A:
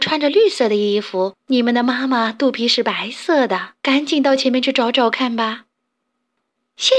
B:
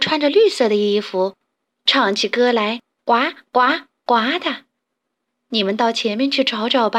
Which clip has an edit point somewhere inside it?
A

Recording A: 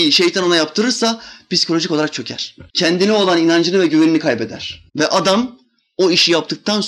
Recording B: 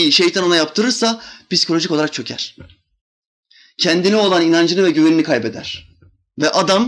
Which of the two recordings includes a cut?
A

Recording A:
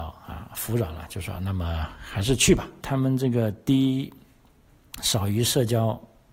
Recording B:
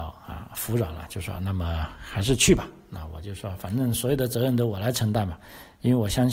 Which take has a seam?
A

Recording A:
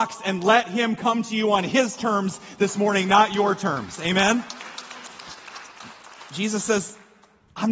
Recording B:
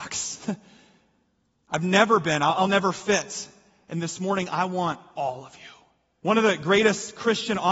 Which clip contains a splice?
B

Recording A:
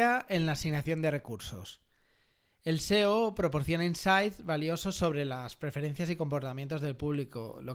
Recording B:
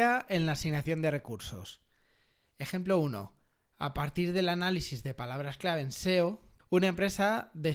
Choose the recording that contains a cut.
B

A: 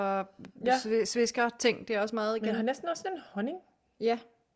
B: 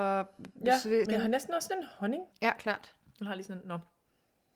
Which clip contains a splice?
B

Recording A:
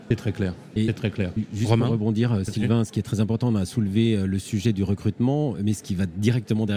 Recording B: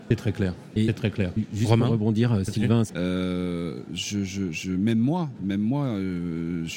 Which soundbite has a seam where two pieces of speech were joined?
B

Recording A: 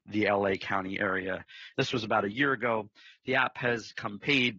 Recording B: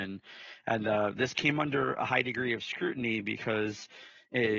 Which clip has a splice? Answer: A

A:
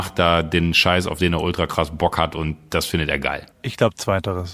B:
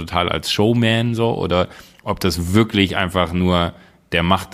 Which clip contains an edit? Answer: A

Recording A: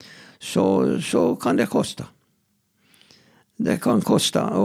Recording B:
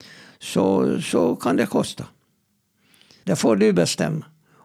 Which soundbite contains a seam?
B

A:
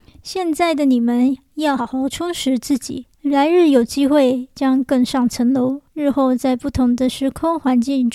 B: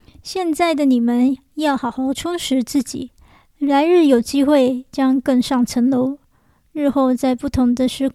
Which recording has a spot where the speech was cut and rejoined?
A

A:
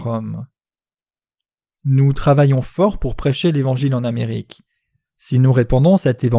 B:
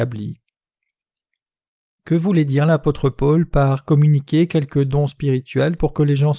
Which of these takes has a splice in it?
A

